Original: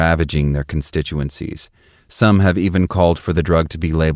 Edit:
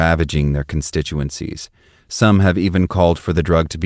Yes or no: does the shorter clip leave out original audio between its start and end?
no